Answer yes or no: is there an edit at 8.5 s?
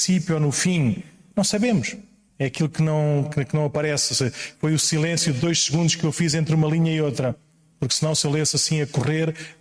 no